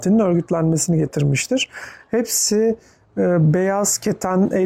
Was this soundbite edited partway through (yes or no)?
no